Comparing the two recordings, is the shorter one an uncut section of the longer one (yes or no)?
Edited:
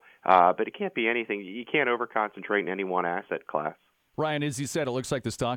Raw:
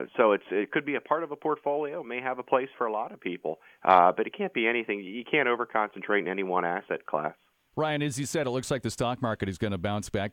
yes